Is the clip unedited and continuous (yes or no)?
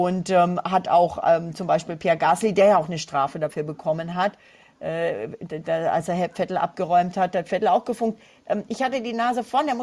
yes